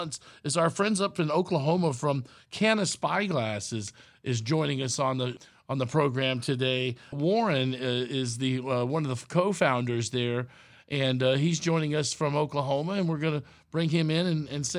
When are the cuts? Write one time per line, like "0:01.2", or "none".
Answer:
none

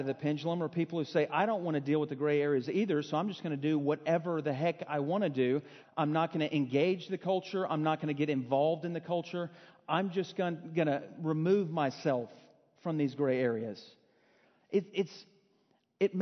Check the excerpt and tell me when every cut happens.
0:05.8

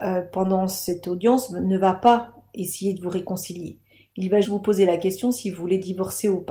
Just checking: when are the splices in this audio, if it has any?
0:04.4

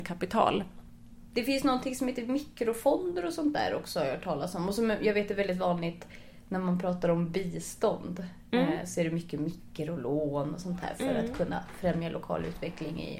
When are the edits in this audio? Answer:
none

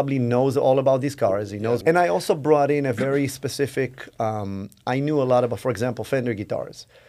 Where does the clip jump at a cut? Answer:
0:01.8

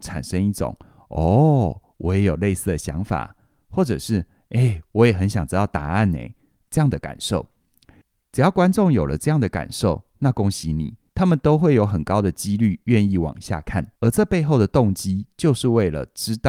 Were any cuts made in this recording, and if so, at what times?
0:11.1
0:14.0

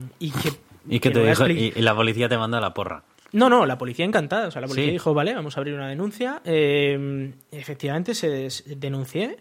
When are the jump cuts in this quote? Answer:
none

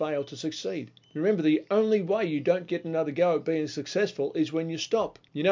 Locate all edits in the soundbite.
0:01.0

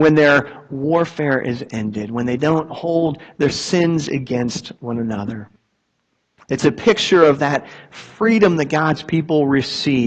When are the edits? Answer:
none

